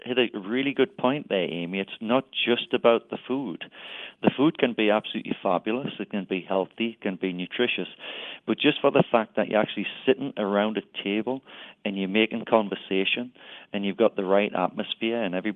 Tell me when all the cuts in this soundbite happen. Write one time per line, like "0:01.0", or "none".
none